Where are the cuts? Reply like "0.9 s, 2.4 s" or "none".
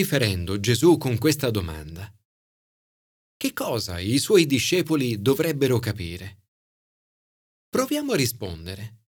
none